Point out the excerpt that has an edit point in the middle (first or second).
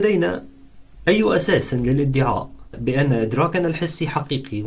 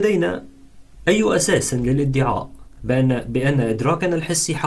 first